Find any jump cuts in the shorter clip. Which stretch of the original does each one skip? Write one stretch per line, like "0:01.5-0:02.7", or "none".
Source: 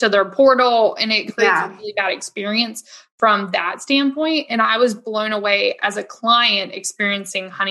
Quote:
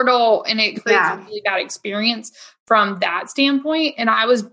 none